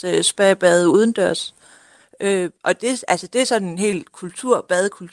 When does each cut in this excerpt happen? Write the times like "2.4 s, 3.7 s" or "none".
none